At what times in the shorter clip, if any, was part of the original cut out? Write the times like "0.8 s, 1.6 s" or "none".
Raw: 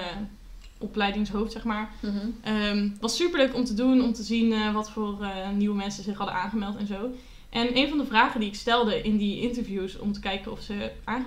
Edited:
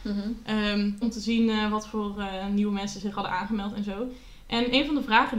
1.0 s